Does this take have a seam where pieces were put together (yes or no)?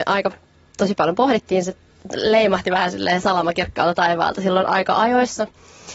no